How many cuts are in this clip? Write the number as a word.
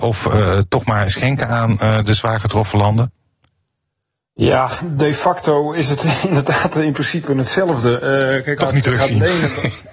one